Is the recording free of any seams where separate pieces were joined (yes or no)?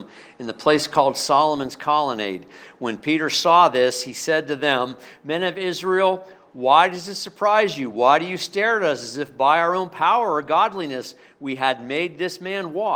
yes